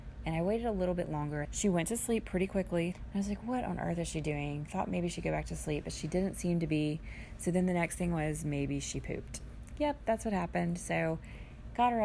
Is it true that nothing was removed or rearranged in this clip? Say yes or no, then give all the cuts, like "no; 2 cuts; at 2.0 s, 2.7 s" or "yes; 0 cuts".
no; 2 cuts; at 1.4 s, 2.9 s